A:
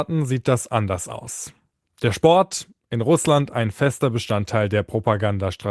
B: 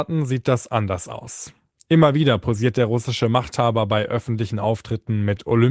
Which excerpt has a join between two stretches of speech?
B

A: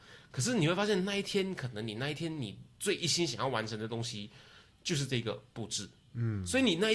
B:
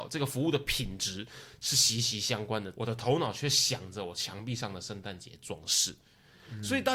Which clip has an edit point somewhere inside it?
B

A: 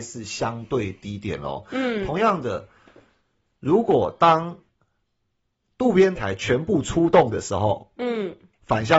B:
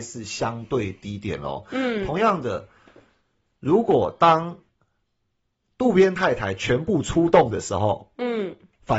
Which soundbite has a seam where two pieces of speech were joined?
A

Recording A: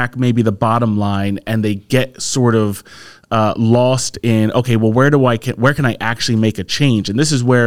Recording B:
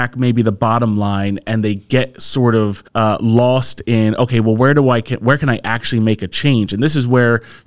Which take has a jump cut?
B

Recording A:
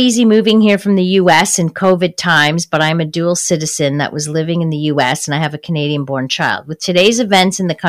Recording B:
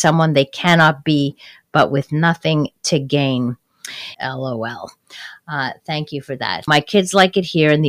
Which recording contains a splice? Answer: B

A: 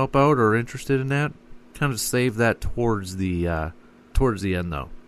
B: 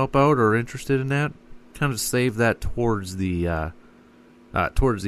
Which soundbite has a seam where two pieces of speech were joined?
A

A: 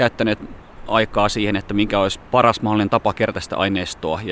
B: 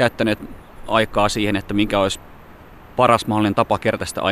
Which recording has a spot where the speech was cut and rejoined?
A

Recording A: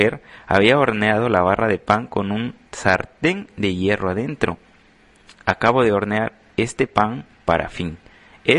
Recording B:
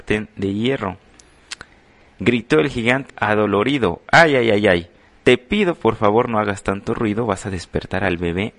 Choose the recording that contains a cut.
B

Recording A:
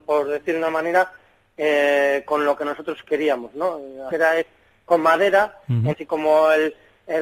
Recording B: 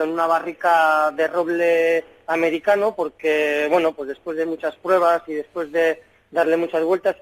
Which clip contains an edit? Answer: A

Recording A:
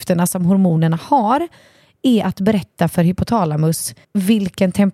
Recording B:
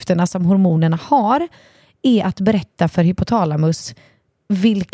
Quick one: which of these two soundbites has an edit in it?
A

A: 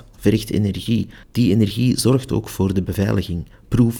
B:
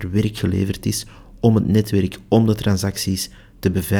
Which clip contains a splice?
A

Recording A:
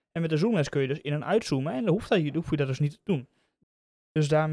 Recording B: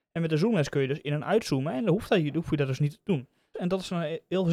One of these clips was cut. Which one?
B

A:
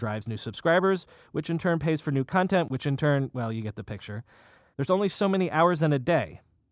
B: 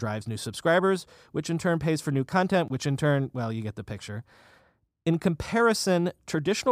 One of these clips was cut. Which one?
A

